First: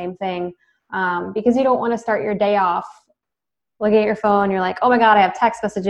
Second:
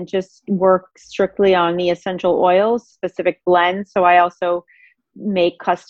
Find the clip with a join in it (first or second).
second